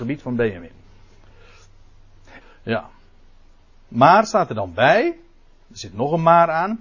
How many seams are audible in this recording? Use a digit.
1